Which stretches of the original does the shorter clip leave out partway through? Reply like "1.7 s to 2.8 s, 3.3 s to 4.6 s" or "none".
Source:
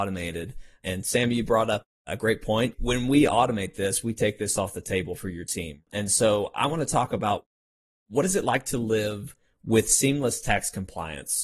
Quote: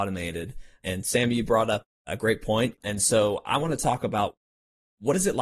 2.8 s to 5.8 s